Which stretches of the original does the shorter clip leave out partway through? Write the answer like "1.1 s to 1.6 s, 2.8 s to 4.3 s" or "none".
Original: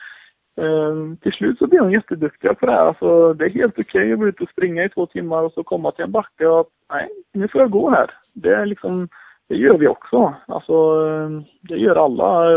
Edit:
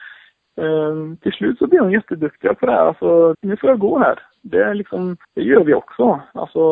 3.3 s to 7.3 s, 9.2 s to 9.4 s